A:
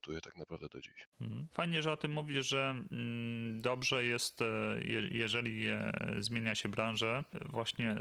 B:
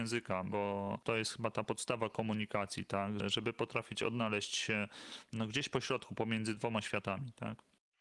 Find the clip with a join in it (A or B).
B